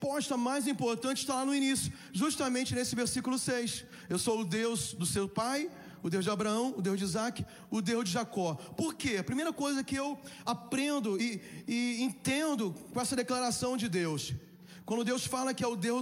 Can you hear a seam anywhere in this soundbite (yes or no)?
no